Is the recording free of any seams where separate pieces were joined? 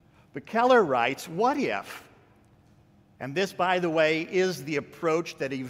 yes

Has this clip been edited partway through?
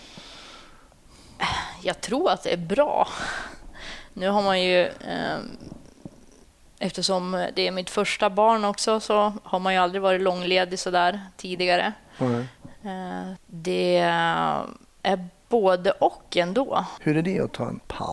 yes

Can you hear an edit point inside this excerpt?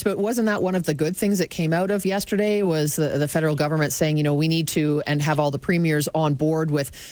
no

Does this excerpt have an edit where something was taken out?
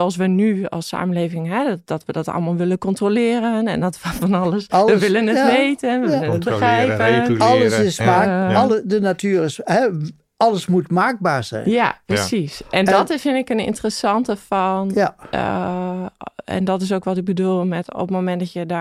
no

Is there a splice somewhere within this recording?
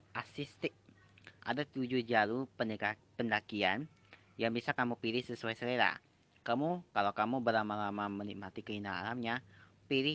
yes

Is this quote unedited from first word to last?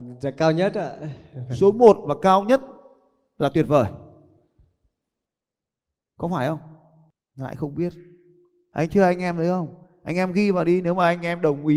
yes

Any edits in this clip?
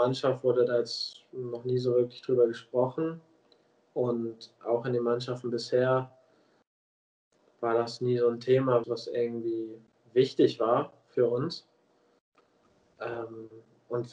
yes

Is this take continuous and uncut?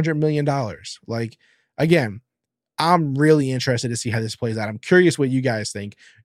yes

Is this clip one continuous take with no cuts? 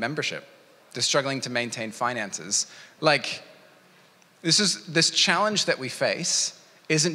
no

